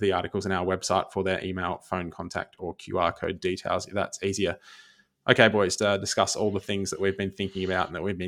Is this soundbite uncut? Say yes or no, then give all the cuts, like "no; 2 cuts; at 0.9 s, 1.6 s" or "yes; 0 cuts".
no; 1 cut; at 5.8 s